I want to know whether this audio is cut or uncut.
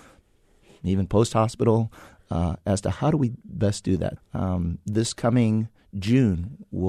cut